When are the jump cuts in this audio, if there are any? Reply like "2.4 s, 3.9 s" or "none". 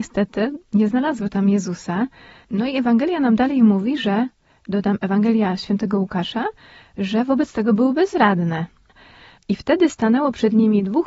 none